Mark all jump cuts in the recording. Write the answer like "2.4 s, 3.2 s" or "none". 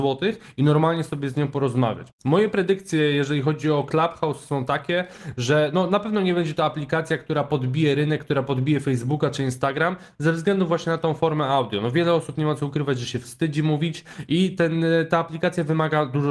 2.1 s